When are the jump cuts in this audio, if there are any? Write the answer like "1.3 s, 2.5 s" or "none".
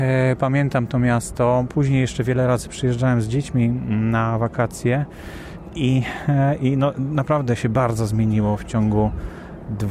none